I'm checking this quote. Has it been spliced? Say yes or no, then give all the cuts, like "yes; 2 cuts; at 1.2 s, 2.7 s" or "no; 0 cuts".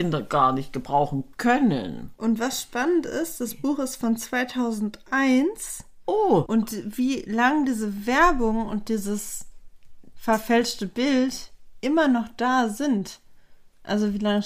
yes; 1 cut; at 6.5 s